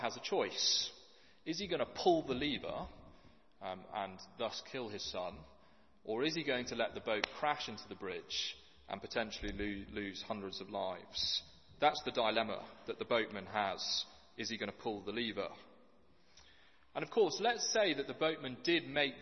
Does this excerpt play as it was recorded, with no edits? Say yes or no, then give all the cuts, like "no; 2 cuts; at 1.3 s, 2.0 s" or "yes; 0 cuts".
yes; 0 cuts